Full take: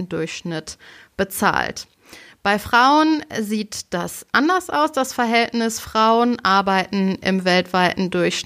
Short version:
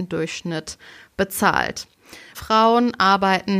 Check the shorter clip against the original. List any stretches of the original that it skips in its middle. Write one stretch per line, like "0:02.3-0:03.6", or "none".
0:02.3-0:05.8